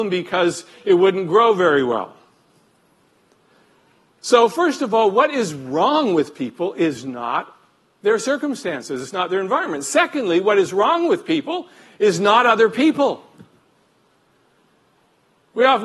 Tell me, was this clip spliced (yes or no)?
no